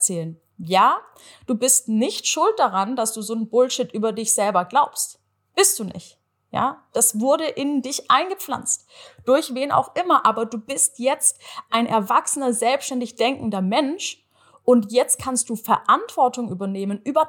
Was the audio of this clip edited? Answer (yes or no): no